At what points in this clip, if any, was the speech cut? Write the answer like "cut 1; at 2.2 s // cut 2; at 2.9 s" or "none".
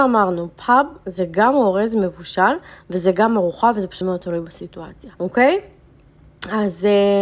cut 1; at 4.0 s // cut 2; at 5.2 s